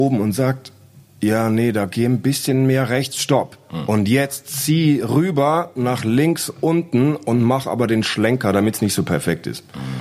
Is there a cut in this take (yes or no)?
no